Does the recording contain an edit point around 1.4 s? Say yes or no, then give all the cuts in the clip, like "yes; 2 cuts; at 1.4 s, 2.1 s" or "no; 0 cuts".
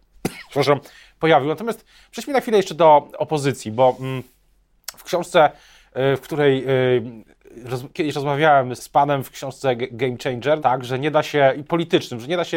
no; 2 cuts; at 8.8 s, 10.6 s